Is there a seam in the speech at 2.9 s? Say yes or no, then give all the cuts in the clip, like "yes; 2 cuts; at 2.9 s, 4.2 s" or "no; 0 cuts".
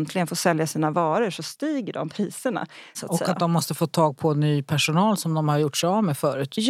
yes; 1 cut; at 2.9 s